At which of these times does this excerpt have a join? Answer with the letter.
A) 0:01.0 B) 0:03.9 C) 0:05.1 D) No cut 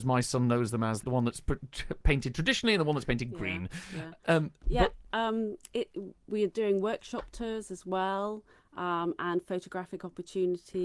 A